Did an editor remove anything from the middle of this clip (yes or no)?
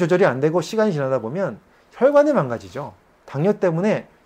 yes